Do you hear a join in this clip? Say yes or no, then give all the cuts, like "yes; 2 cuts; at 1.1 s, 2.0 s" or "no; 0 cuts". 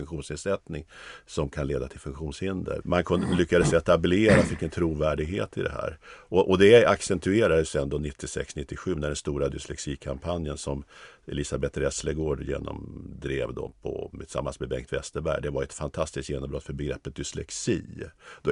yes; 2 cuts; at 2.8 s, 14.1 s